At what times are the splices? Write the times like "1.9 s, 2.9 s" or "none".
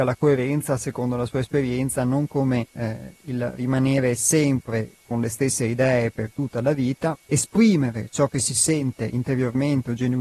2.7 s, 7.1 s

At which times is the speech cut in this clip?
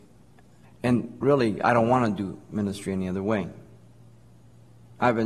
none

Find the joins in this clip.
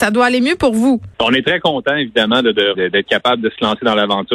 1.1 s, 2.7 s

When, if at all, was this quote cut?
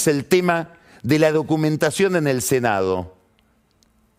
none

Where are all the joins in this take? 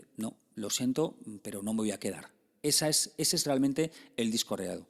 none

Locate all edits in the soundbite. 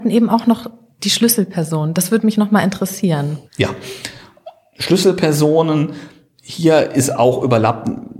3.5 s

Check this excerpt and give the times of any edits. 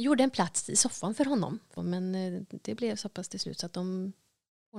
1.8 s

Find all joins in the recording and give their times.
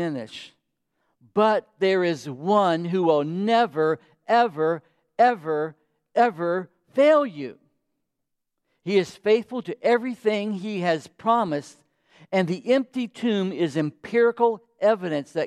none

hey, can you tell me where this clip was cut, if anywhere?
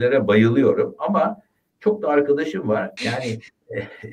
3.0 s

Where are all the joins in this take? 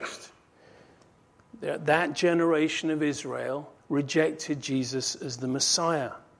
3.8 s

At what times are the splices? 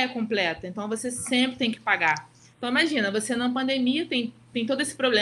none

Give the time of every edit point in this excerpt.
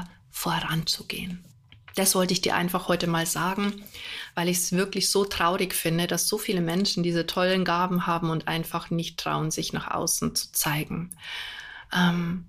none

